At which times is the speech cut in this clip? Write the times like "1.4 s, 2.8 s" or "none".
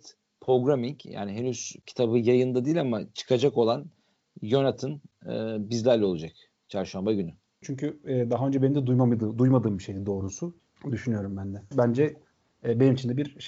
7.6 s, 10.6 s, 11.7 s